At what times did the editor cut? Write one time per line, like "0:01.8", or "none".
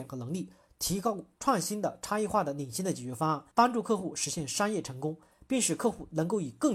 0:03.5